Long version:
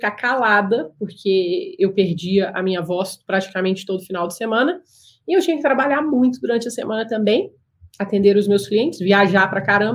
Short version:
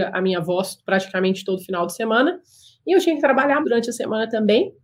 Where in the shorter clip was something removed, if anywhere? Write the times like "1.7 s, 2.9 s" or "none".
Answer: 3.6 s